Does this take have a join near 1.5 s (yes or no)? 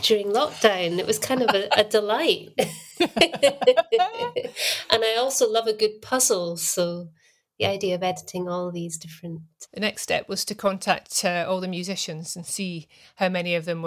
no